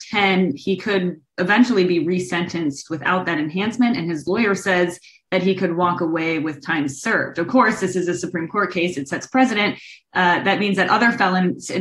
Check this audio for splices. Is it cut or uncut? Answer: uncut